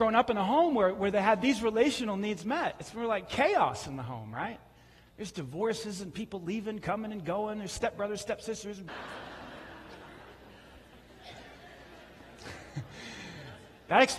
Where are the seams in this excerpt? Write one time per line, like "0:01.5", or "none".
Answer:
0:08.9